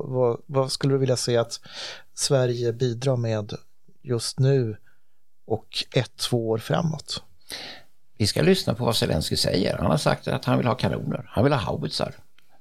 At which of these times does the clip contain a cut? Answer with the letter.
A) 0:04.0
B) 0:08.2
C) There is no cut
C